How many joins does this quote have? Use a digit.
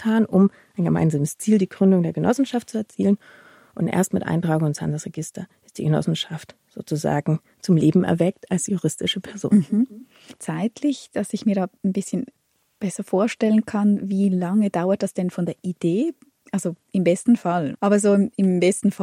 1